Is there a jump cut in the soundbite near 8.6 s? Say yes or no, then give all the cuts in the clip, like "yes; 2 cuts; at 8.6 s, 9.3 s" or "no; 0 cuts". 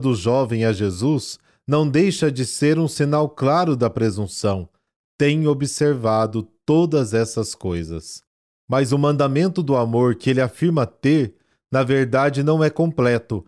no; 0 cuts